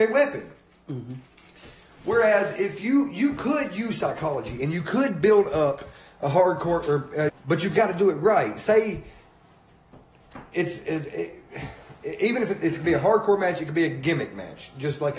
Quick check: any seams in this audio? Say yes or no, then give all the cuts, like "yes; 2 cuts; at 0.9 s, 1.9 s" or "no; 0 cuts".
yes; 1 cut; at 7.3 s